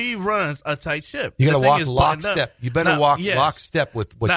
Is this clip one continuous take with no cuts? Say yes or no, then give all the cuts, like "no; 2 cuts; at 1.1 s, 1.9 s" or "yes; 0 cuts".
yes; 0 cuts